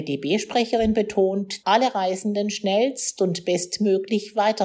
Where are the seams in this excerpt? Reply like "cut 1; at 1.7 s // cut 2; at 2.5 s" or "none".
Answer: cut 1; at 1.6 s